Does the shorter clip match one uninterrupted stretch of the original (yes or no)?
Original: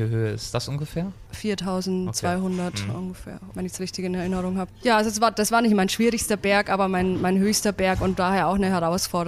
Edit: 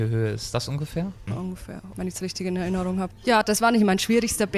no